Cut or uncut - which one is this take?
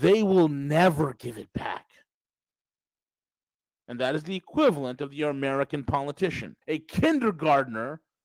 cut